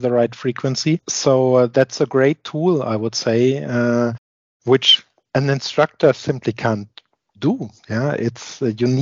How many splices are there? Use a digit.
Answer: 0